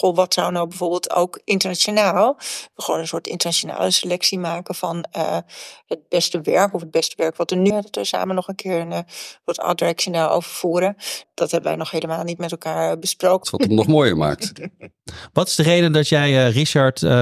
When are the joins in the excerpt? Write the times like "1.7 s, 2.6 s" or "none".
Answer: 7.7 s, 11.2 s, 13.4 s